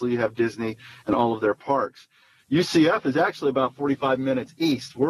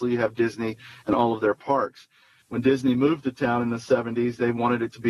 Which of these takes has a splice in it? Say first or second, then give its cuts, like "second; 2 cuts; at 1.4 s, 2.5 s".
second; 1 cut; at 2.4 s